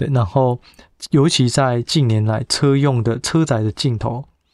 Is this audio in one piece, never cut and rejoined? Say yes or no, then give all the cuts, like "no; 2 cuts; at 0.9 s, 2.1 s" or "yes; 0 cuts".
yes; 0 cuts